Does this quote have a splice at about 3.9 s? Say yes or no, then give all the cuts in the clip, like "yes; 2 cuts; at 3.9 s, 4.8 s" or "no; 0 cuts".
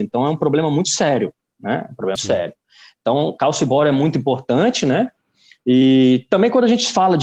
no; 1 cut; at 2.2 s